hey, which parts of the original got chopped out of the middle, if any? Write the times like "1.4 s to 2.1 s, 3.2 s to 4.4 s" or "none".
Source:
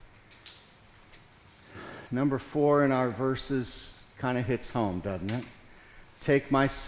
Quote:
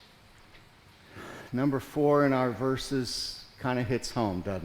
none